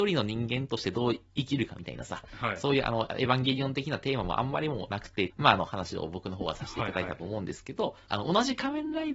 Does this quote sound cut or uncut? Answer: cut